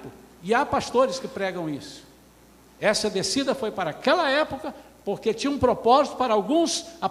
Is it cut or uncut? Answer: uncut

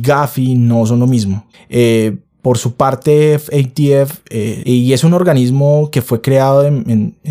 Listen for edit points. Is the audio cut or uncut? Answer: cut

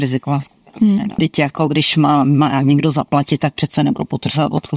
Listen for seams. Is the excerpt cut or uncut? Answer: cut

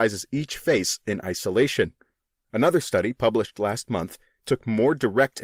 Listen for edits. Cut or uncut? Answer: uncut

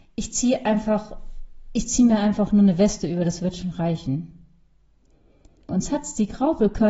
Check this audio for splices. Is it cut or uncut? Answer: cut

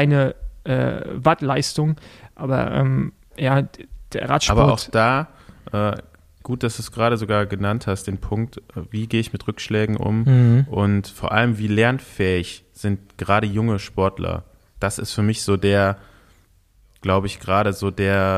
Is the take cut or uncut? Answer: uncut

